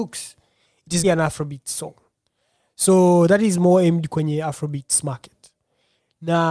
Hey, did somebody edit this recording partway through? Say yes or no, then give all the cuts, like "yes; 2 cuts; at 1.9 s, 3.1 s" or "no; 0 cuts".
yes; 1 cut; at 1.0 s